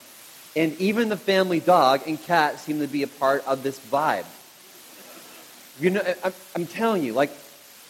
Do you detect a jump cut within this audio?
no; 0 cuts

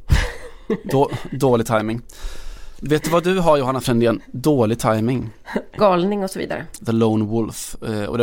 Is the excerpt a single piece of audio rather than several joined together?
no; 2 cuts; at 5.8 s, 6.8 s

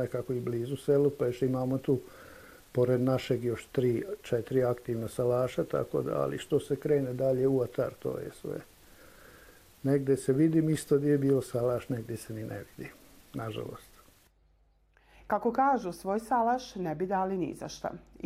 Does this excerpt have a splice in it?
no; 0 cuts

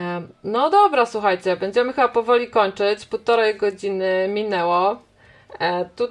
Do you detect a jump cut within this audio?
no; 0 cuts

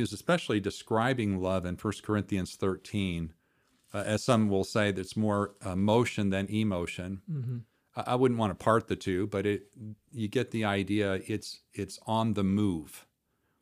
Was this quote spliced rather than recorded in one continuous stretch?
no; 0 cuts

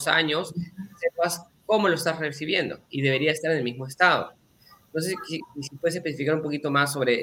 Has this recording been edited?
no; 0 cuts

